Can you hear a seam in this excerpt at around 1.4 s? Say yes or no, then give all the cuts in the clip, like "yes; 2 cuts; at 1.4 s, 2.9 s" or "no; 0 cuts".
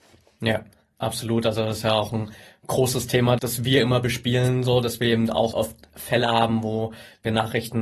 no; 2 cuts; at 3.4 s, 5.5 s